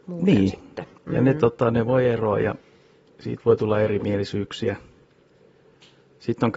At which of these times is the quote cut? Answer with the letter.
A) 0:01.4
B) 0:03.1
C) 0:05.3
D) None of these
D